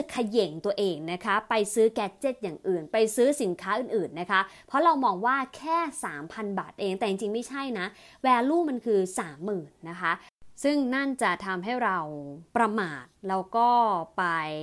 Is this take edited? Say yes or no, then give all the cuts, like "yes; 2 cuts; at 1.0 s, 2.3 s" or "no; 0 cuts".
yes; 1 cut; at 12.5 s